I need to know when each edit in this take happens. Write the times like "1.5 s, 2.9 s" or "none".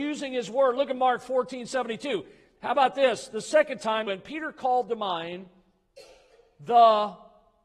4.1 s

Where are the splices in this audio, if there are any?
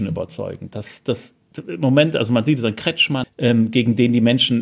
3.2 s

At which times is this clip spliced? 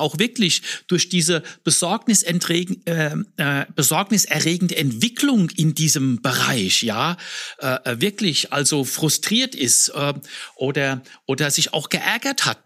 none

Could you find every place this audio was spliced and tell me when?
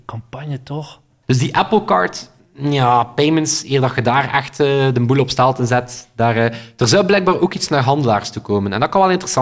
1.2 s

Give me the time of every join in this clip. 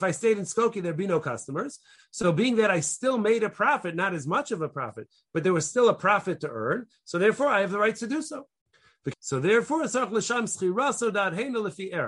9.1 s

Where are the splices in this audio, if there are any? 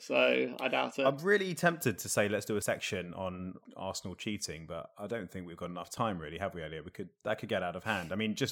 none

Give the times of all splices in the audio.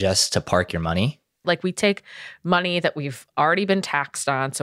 1.4 s

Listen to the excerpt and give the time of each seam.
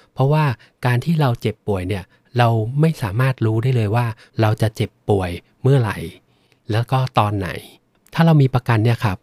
none

